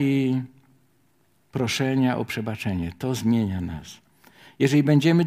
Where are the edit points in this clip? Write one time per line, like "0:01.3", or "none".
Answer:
none